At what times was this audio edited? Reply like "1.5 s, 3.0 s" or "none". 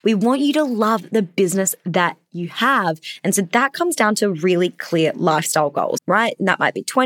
6.0 s